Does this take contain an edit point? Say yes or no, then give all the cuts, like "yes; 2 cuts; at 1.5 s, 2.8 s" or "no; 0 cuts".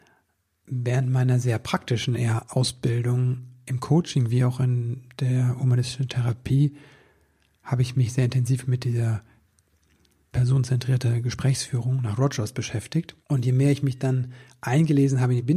yes; 2 cuts; at 10.3 s, 13.2 s